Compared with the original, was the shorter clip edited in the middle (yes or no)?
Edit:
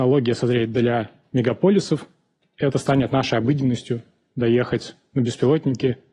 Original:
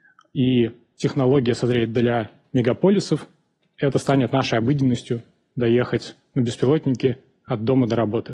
no